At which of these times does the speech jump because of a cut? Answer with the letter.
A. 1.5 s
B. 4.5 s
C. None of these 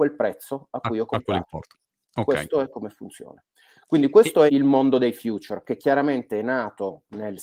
B